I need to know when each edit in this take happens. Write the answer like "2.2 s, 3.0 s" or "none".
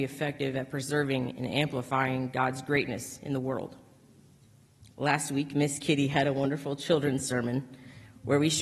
none